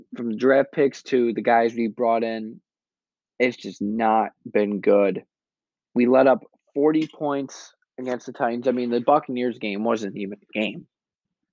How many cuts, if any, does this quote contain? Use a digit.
0